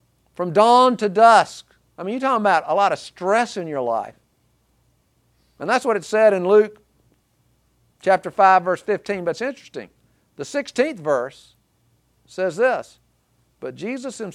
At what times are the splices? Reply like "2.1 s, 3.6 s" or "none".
none